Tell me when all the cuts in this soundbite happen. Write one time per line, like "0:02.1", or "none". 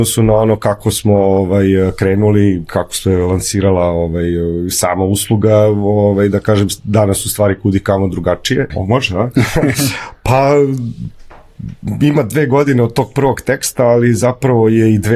0:08.7